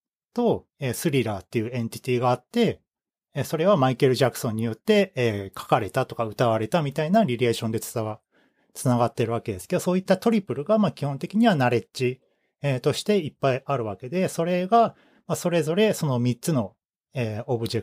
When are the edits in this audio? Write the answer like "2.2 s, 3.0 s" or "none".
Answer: none